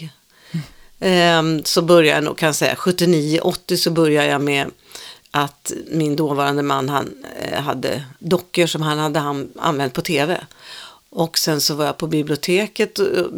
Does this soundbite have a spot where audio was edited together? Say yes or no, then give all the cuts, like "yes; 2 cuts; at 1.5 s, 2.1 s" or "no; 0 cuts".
no; 0 cuts